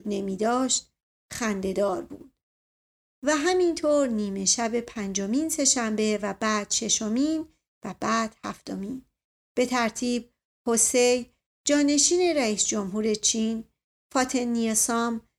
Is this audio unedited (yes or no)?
yes